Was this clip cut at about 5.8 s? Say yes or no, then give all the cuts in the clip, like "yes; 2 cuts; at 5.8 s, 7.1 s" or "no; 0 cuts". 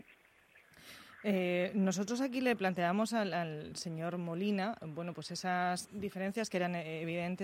yes; 1 cut; at 5.8 s